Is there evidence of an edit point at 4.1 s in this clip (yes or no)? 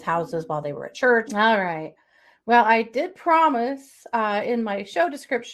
no